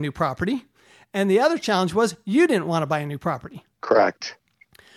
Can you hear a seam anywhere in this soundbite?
yes; 1 cut; at 3.7 s

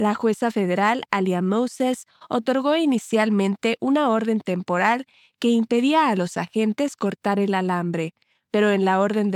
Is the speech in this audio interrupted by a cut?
no; 0 cuts

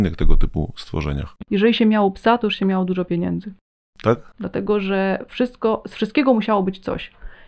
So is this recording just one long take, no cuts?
no; 1 cut; at 4.3 s

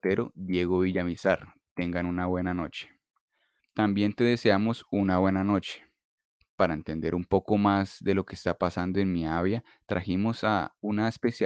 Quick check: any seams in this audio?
yes; 1 cut; at 3.6 s

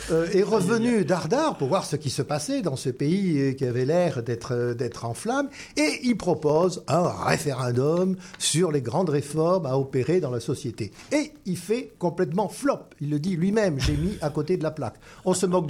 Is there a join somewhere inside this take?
no; 0 cuts

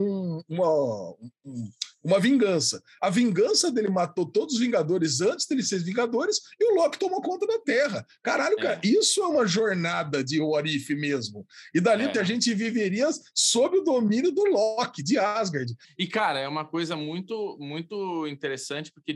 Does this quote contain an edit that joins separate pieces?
yes; 2 cuts; at 12.1 s, 15.8 s

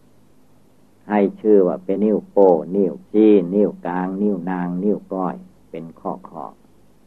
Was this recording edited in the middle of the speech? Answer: yes; 2 cuts; at 2.0 s, 3.0 s

